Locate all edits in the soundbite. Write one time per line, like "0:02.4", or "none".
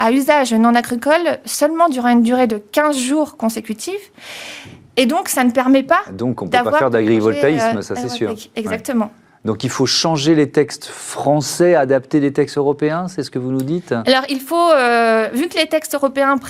none